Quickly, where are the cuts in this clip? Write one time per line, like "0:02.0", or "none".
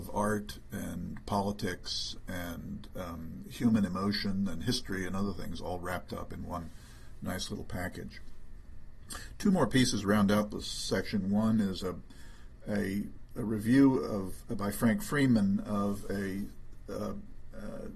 none